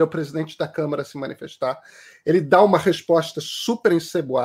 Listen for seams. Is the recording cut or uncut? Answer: uncut